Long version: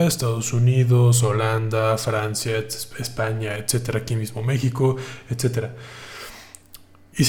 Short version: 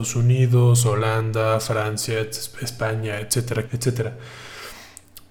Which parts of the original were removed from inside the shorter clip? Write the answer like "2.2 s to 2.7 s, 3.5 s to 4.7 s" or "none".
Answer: 4.0 s to 5.2 s

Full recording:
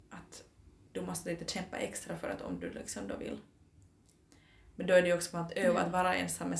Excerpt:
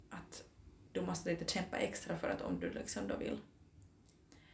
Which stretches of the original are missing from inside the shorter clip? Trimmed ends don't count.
none

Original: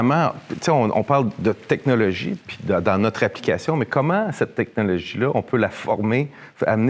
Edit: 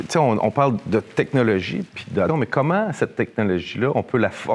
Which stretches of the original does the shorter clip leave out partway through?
2.8 s to 3.7 s

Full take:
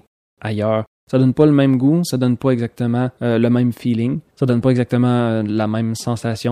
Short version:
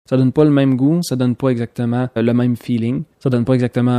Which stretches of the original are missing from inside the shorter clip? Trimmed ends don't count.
3.2 s to 3.3 s

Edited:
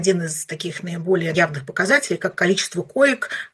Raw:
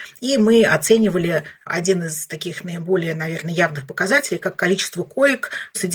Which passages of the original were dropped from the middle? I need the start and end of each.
3.2 s to 3.6 s

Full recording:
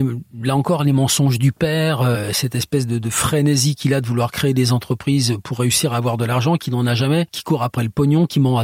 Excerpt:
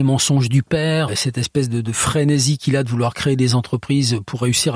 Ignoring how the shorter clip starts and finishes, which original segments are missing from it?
2.0 s to 2.2 s

